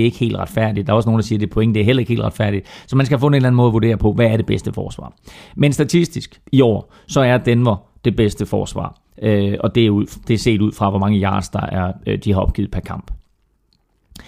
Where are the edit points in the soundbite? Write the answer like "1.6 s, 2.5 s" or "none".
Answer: none